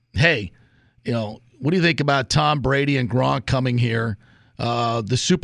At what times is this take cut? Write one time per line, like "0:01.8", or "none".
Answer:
none